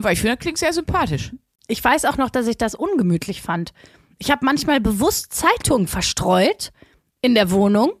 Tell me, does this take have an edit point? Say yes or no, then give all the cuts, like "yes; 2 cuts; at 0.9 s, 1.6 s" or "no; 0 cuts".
no; 0 cuts